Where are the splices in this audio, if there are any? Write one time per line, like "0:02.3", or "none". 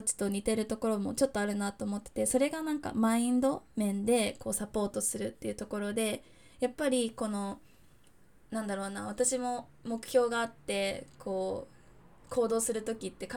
none